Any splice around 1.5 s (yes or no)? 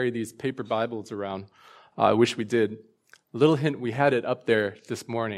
no